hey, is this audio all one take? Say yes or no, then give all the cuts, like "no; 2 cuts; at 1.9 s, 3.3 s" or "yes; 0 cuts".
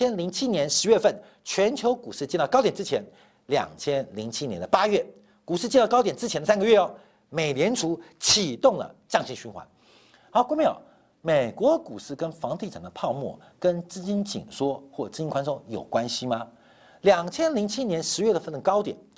yes; 0 cuts